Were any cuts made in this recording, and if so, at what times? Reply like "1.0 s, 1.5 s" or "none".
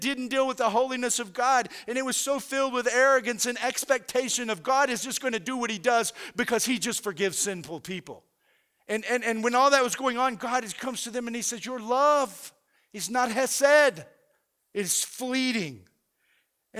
14.6 s